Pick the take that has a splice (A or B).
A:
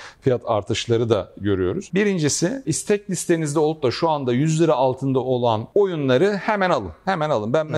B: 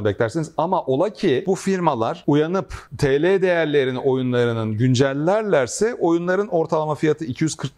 A